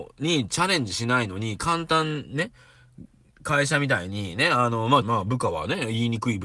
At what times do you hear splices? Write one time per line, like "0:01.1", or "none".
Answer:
0:05.0